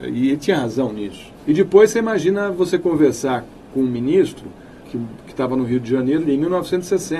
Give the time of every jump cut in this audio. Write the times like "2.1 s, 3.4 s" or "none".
1.4 s, 4.8 s, 6.3 s